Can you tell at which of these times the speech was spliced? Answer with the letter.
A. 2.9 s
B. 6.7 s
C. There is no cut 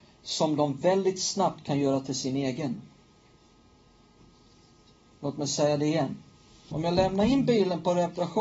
B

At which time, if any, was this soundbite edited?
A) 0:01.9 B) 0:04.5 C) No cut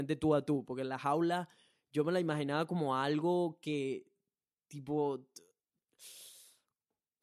C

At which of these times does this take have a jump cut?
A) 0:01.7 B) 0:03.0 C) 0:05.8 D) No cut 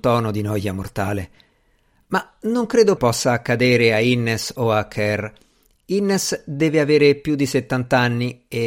B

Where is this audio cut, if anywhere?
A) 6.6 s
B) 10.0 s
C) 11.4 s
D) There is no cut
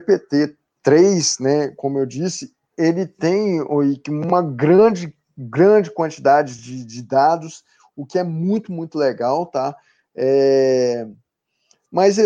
D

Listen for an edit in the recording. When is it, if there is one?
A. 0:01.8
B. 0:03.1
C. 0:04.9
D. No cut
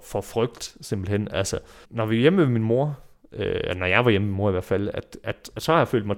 A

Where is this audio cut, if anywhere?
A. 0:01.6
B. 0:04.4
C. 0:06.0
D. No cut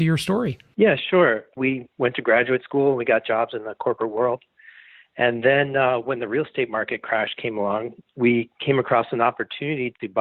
A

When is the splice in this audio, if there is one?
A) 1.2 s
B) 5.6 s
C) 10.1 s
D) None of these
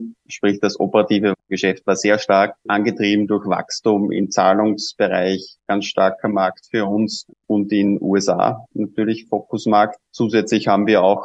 B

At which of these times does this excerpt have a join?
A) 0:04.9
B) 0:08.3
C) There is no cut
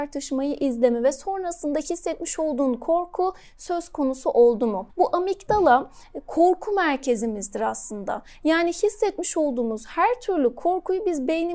A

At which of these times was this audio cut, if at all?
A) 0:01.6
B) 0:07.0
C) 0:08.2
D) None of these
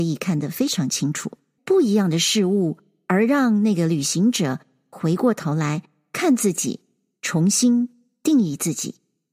A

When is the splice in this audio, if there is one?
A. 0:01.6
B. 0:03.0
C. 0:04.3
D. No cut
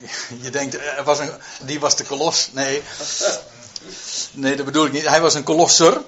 A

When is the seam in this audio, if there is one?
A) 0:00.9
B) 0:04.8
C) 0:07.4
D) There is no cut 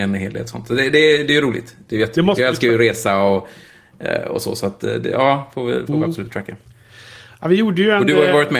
D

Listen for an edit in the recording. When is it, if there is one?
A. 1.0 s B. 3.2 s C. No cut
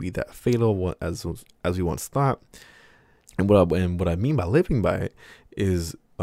B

